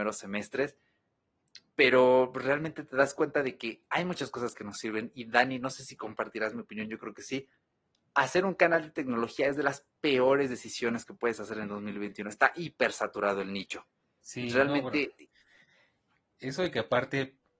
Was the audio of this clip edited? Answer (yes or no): no